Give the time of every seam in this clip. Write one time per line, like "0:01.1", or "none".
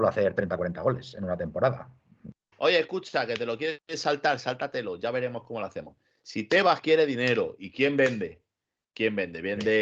0:02.5